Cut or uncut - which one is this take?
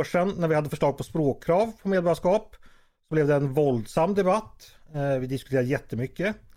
uncut